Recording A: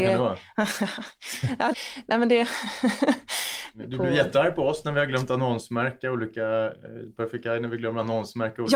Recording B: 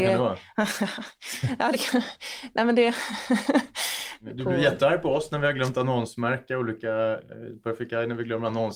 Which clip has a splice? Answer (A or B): A